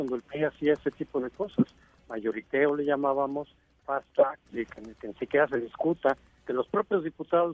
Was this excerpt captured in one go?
no; 1 cut; at 4.5 s

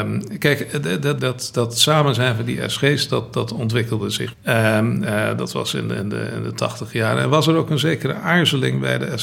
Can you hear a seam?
yes; 2 cuts; at 1.2 s, 4.3 s

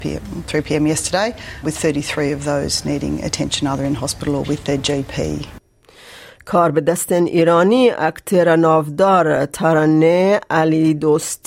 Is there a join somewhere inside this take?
yes; 1 cut; at 1.6 s

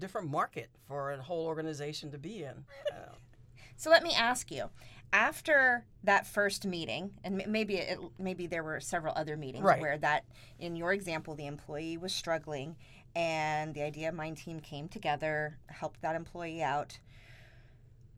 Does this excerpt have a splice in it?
no; 0 cuts

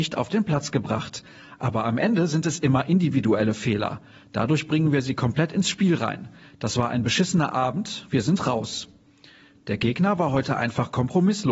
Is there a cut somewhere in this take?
no; 0 cuts

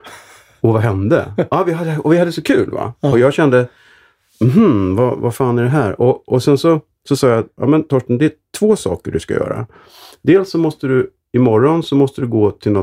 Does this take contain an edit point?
no; 0 cuts

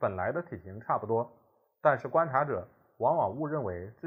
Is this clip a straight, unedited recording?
yes; 0 cuts

